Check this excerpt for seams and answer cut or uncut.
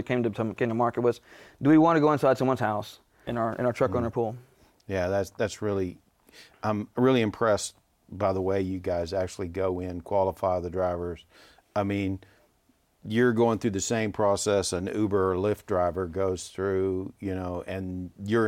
cut